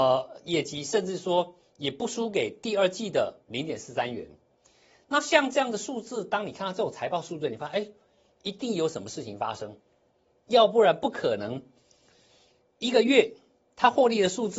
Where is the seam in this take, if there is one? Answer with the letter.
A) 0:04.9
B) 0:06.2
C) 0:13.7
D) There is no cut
D